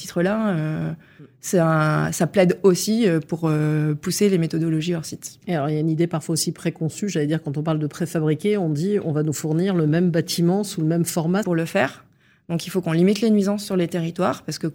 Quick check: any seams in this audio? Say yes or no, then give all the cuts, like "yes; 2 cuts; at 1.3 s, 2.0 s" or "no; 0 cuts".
yes; 1 cut; at 11.4 s